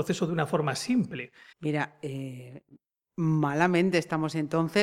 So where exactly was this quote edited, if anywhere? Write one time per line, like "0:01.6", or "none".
0:01.5